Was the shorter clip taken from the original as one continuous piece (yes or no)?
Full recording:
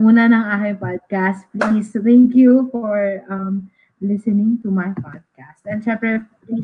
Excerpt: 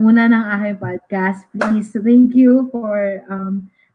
yes